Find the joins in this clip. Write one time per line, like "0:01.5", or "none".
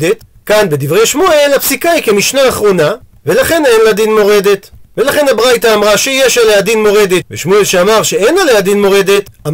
0:04.8
0:07.2

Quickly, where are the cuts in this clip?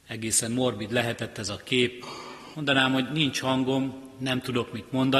0:02.5

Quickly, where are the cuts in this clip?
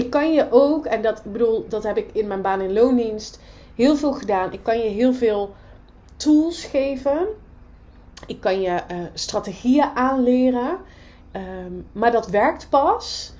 0:11.2

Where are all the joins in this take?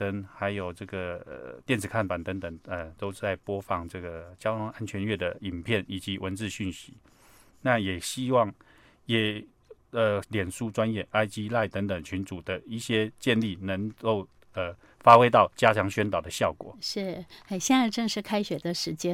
0:10.2

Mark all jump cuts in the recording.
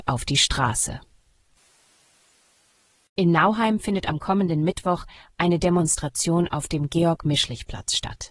none

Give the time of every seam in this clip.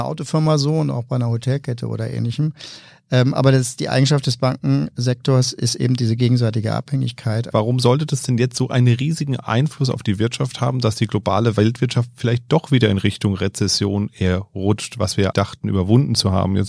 0:07.5
0:15.3

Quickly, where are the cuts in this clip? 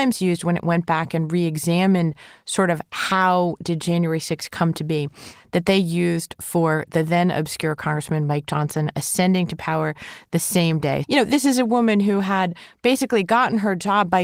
0:11.0

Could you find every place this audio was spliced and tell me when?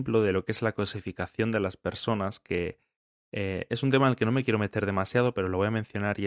none

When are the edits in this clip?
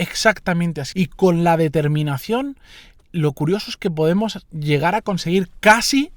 0:00.9

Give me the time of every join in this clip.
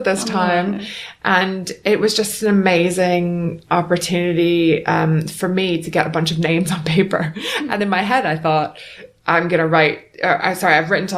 none

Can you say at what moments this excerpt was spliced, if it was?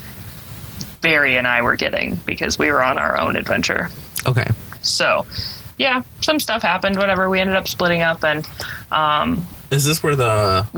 0:05.8

